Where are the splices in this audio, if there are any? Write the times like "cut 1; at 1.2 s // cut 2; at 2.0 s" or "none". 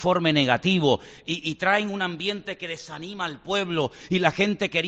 none